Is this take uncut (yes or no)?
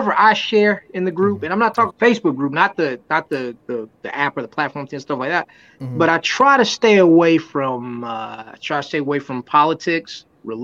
no